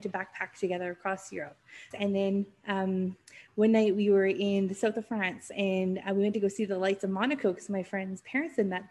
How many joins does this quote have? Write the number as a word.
one